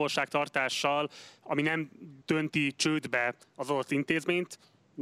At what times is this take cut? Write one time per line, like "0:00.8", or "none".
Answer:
0:02.2